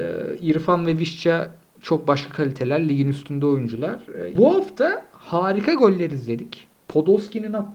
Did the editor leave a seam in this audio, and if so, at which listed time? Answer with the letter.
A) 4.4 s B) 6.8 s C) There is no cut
A